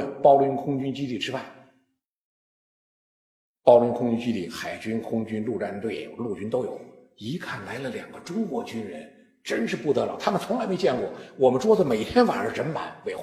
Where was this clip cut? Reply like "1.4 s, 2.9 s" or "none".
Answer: none